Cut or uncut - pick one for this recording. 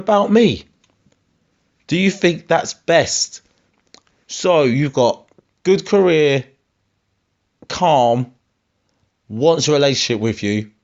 uncut